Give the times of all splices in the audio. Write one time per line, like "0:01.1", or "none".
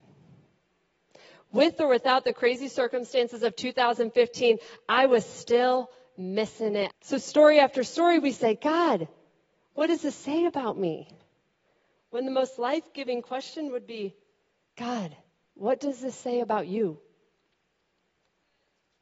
0:06.9